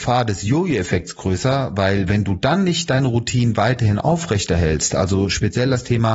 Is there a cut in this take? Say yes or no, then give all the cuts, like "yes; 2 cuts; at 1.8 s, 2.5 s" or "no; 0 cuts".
no; 0 cuts